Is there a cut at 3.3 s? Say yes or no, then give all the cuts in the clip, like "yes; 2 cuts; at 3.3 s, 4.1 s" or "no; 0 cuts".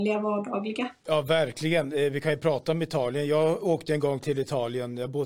no; 1 cut; at 1.0 s